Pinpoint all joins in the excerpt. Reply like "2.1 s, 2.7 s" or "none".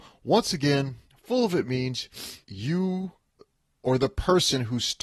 2.4 s